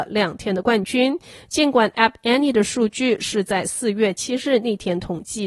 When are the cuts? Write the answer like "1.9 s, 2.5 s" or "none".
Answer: none